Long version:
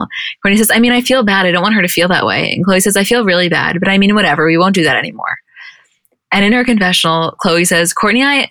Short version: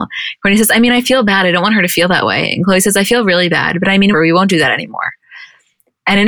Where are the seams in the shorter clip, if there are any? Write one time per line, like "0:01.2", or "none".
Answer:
0:04.1